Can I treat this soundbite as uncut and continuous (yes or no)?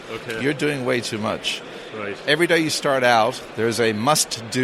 yes